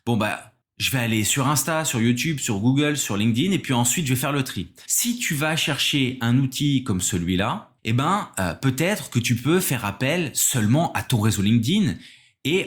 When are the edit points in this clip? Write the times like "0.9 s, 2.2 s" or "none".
4.9 s, 7.8 s